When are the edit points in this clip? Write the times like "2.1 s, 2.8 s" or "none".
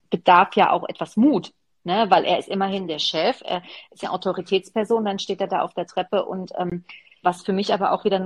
4.0 s, 7.2 s

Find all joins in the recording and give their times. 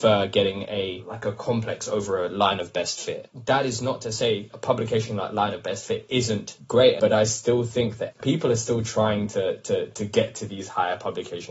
none

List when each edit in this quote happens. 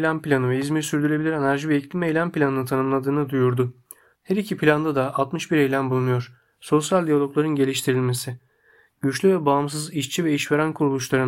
4.1 s, 6.5 s

